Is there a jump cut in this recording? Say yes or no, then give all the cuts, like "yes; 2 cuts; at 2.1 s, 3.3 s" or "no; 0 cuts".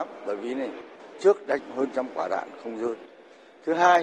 yes; 1 cut; at 1.1 s